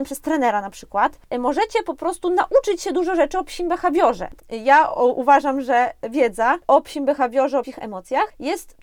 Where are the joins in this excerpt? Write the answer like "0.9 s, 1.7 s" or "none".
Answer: 4.4 s, 7.6 s